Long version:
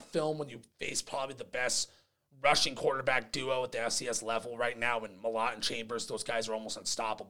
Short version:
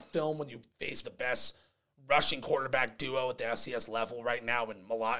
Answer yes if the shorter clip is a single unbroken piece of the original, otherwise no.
no